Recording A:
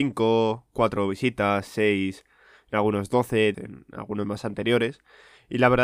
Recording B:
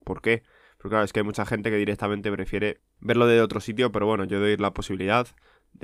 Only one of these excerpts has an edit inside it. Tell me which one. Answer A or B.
A